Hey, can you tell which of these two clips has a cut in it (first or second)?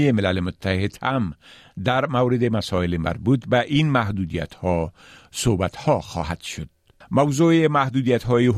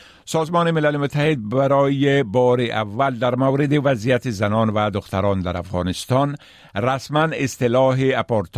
first